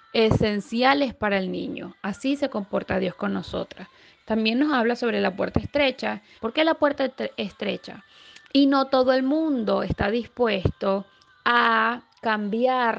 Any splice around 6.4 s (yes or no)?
yes